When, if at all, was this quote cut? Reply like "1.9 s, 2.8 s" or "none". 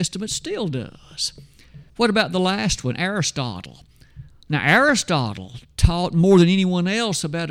1.9 s

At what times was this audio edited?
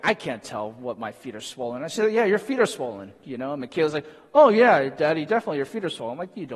none

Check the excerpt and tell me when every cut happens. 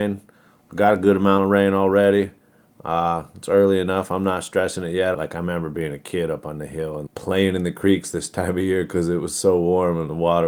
5.1 s, 7.1 s

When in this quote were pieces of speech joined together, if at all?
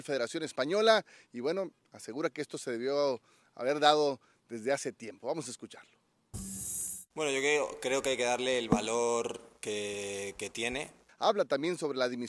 11.1 s

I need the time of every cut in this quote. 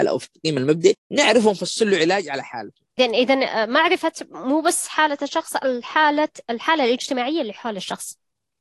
2.9 s

